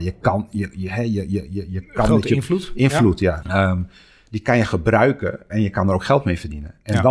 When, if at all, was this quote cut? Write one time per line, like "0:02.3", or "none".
0:03.4
0:05.5